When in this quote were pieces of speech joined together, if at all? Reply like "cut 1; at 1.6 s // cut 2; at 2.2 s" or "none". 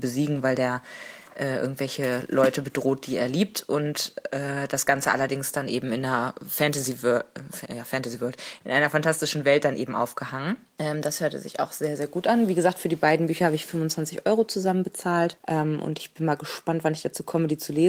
none